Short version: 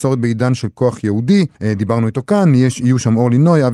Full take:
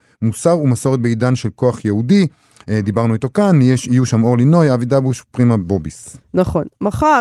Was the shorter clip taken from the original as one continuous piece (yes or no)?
no